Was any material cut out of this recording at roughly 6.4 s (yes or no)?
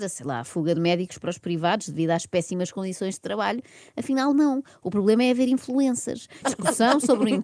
yes